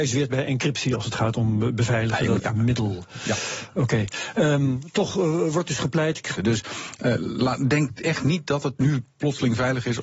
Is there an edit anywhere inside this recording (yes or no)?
yes